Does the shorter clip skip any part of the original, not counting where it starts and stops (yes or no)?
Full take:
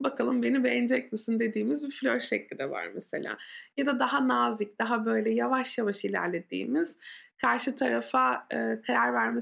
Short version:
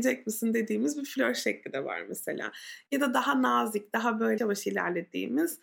yes